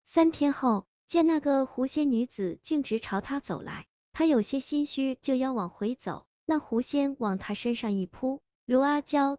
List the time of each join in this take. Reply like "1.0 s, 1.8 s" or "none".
1.0 s